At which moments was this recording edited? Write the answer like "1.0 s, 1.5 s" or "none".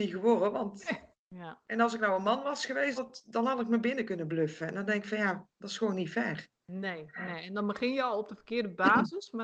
1.1 s, 3.0 s